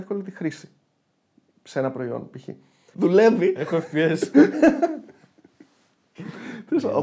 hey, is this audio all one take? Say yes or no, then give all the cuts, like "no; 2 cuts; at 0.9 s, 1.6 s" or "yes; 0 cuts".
no; 1 cut; at 2.9 s